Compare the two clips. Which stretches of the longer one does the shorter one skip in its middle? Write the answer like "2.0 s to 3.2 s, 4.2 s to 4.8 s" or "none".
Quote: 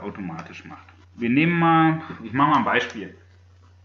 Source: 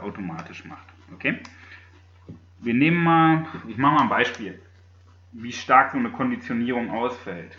1.0 s to 2.5 s